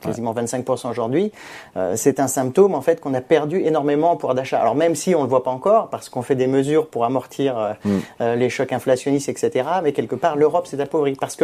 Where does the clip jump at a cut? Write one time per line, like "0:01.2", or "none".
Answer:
none